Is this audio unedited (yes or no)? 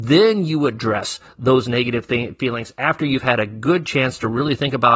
yes